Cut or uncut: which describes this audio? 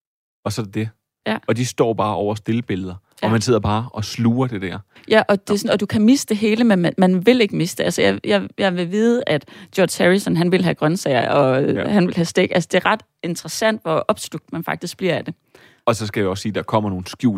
uncut